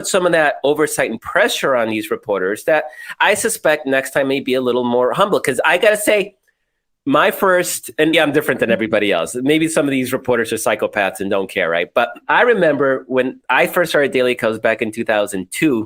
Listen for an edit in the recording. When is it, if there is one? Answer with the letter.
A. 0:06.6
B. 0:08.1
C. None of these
B